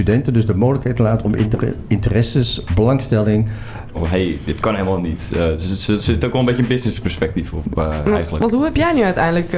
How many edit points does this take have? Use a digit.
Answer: 1